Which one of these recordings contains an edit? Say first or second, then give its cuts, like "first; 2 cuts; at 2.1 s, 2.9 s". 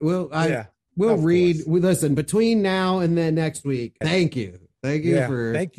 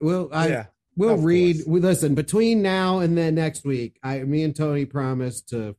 first; 1 cut; at 4.0 s